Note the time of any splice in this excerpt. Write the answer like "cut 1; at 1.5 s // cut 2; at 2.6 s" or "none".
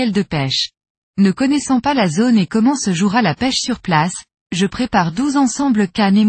cut 1; at 1.1 s

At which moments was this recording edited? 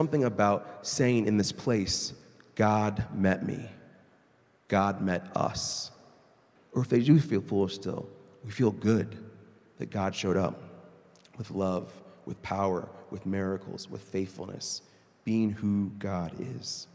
cut 1; at 6.6 s

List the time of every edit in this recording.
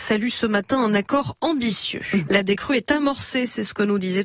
cut 1; at 2.3 s

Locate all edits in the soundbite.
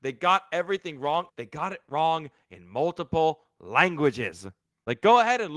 cut 1; at 1.3 s

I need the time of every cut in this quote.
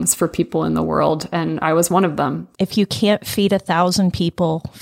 cut 1; at 2.5 s

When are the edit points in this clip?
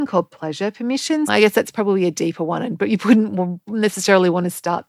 cut 1; at 1.3 s

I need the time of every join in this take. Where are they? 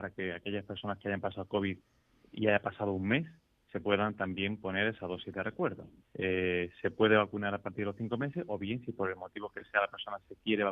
cut 1; at 6.0 s

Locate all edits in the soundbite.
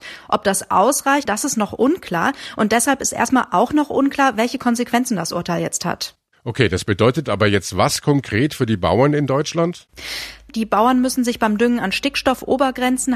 cut 1; at 1.3 s // cut 2; at 10.5 s

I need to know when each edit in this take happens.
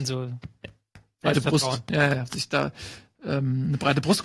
none

